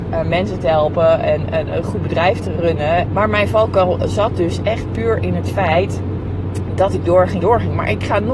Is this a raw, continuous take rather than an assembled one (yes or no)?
no